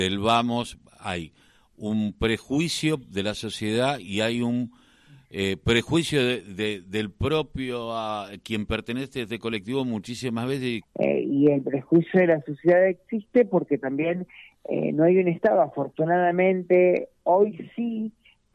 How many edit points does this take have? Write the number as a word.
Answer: one